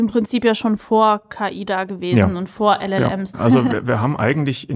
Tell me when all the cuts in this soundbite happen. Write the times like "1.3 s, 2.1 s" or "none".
3.3 s